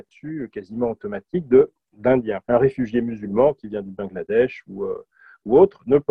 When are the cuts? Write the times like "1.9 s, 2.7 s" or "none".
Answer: 2.4 s